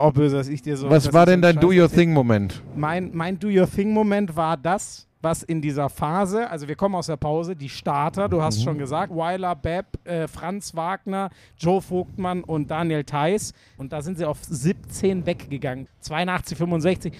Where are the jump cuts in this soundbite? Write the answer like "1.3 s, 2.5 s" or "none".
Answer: 9.1 s, 13.8 s, 15.9 s